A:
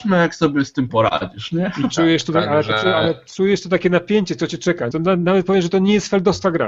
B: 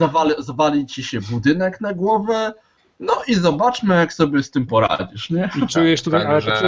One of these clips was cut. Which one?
A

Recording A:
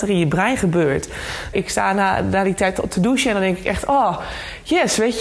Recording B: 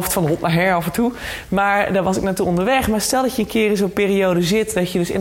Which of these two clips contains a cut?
A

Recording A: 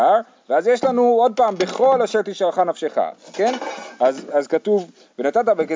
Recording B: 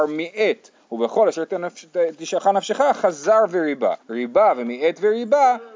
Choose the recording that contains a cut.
B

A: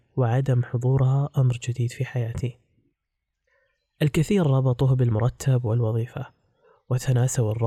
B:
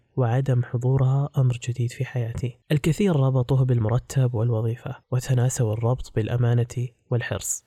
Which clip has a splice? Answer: B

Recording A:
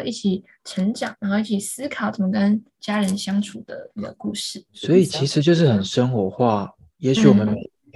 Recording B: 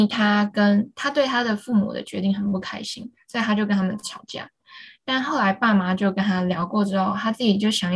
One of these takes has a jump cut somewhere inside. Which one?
A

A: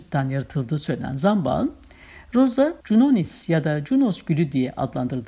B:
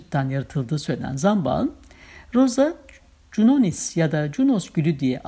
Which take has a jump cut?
A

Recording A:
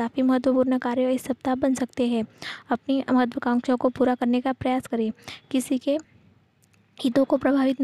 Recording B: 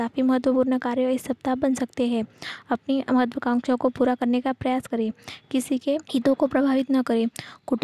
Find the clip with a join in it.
B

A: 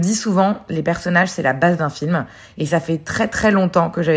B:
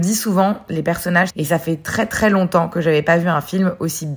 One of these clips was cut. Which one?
B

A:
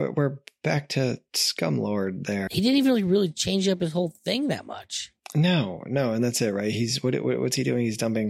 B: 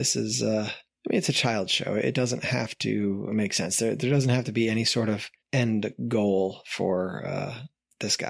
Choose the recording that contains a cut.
A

